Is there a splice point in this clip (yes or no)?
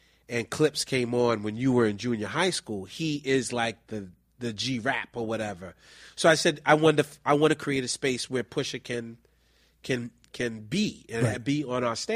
no